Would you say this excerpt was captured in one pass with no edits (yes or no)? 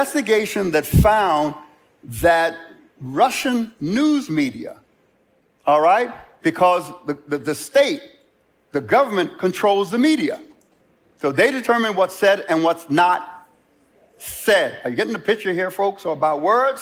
yes